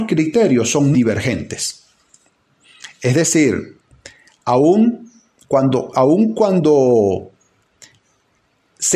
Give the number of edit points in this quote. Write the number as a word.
one